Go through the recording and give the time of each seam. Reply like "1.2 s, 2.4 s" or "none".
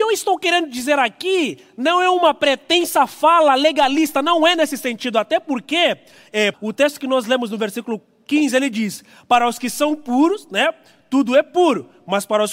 6.5 s